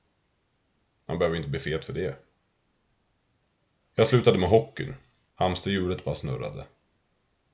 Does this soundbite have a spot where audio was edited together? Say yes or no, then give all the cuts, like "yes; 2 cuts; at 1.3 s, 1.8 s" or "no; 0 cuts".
yes; 2 cuts; at 3.8 s, 5.3 s